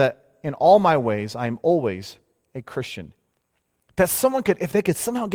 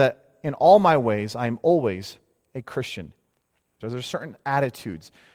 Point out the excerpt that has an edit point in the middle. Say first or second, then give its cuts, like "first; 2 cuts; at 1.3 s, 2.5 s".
second; 1 cut; at 3.8 s